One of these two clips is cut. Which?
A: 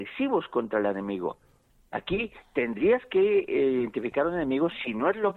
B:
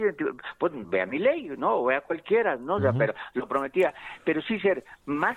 B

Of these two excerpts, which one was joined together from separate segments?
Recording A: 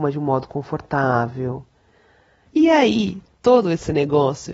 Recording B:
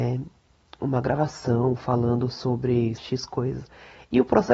B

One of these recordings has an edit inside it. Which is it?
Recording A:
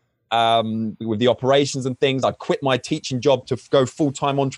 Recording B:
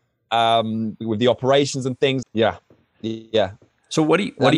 B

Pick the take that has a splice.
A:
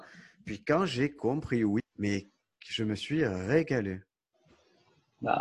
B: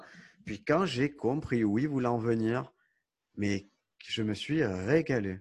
A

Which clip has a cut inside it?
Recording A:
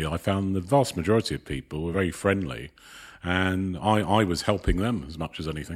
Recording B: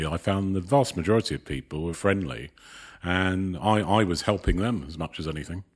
B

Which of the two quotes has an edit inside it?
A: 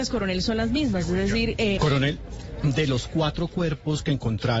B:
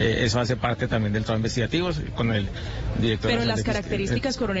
A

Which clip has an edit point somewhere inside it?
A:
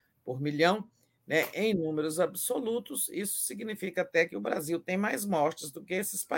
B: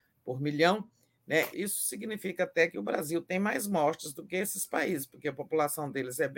B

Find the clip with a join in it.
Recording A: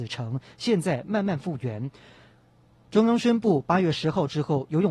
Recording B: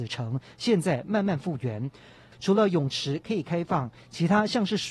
B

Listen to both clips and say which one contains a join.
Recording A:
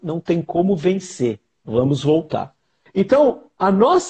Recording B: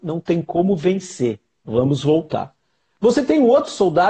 A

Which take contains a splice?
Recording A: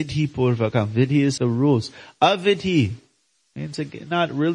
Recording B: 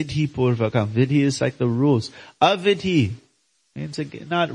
A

